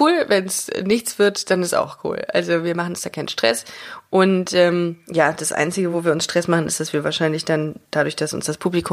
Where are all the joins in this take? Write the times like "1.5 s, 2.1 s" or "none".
none